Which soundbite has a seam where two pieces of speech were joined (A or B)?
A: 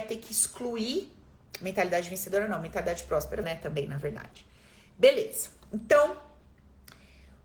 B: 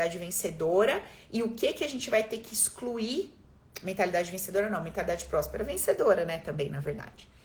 A